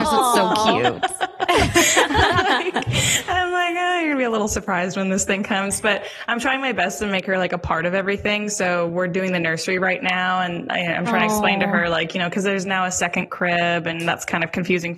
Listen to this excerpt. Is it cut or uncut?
uncut